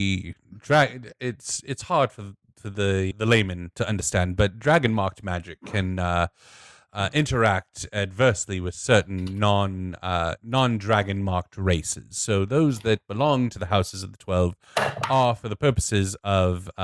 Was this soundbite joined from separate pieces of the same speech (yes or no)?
yes